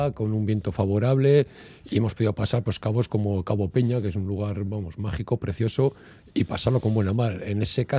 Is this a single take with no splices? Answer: yes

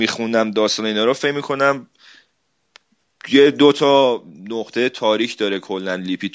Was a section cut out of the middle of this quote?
no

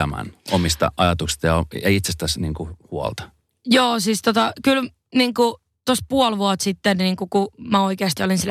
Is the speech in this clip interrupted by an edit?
no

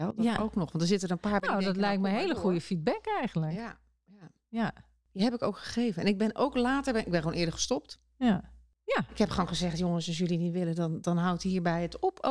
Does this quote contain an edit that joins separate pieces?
no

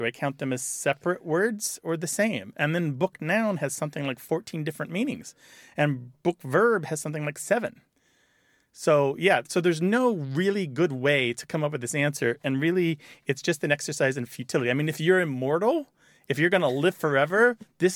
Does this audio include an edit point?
no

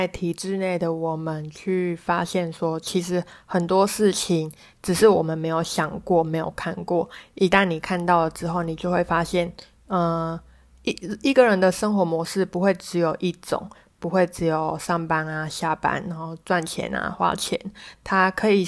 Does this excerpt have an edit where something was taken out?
no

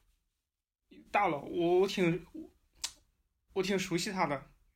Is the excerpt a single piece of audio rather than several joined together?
yes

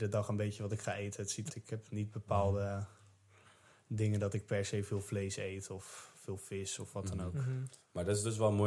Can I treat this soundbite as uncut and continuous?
no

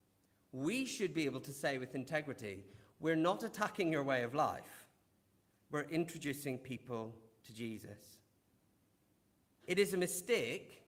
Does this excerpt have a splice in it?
yes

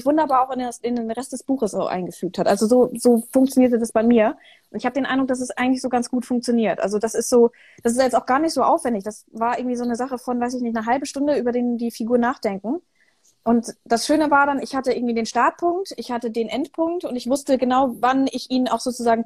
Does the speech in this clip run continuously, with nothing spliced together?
yes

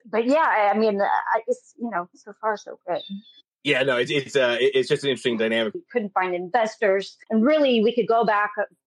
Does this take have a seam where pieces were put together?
yes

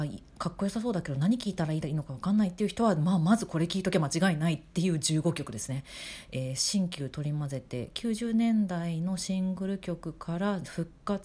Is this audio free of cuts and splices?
yes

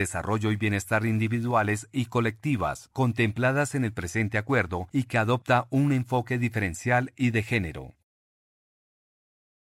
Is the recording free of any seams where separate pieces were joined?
yes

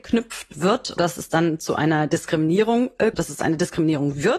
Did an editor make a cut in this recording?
yes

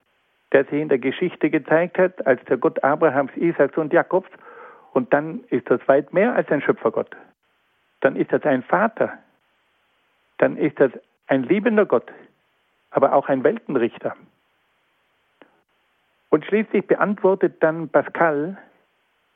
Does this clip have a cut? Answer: no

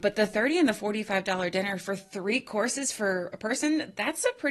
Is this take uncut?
yes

